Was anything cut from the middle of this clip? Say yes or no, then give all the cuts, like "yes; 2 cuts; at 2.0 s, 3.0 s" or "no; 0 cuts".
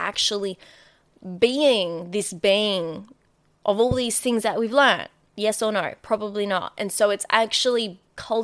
no; 0 cuts